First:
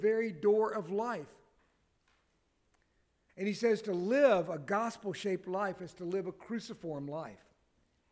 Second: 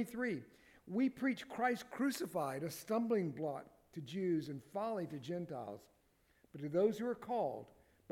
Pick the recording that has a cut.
first; 1 cut; at 3.3 s

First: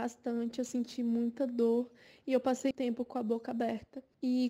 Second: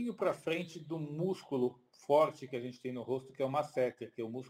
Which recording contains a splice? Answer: first; 1 cut; at 2.7 s

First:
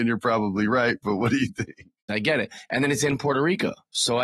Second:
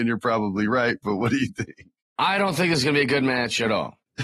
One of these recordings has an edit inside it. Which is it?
first; 1 cut; at 2.1 s

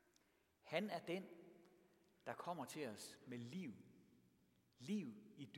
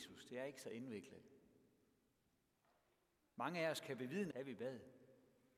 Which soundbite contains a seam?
second; 1 cut; at 4.3 s

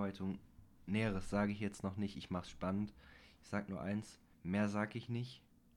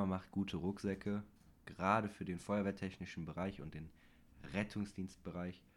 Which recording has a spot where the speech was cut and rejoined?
first; 1 cut; at 4.3 s

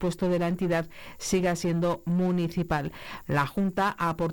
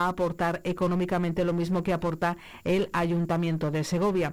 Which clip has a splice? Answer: first; 1 cut; at 3.2 s

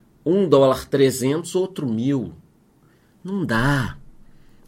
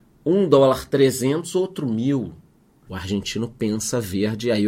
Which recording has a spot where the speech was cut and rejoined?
second; 1 cut; at 2.9 s

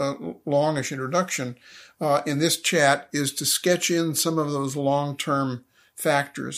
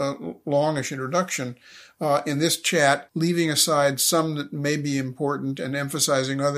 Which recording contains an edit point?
second; 1 cut; at 3.1 s

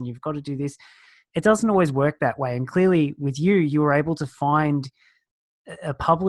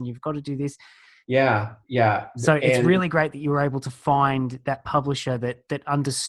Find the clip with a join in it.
second; 1 cut; at 1.2 s

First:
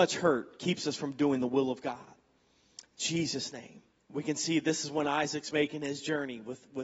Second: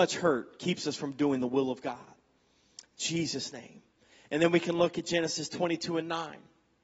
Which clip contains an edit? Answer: first; 1 cut; at 4.0 s

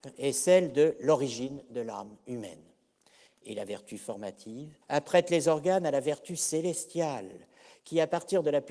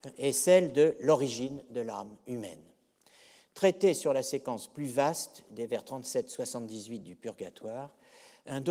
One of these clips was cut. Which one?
first; 2 cuts; at 3.3 s, 4.8 s

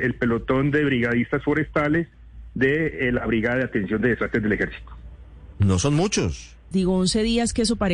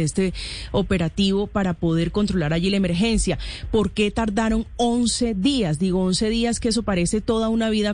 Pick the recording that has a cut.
first; 1 cut; at 6.7 s

